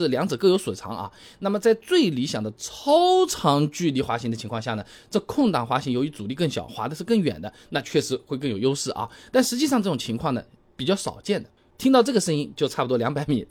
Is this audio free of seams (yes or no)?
no